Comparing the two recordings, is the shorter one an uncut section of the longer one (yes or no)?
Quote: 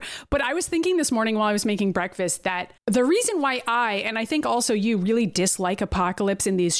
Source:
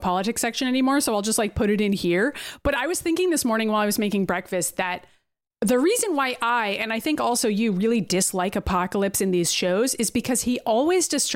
no